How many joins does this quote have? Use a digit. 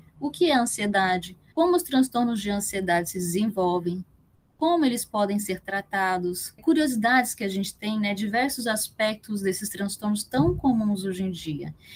2